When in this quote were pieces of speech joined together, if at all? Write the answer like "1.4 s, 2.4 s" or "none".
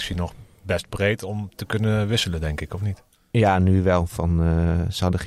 none